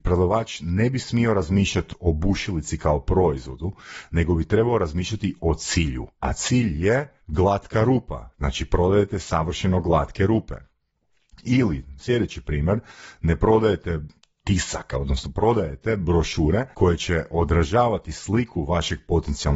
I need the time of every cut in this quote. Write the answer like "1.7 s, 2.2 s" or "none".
7.2 s, 14.9 s, 16.7 s